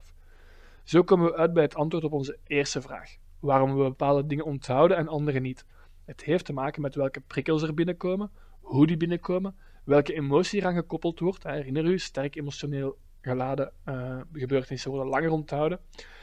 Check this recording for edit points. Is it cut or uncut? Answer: uncut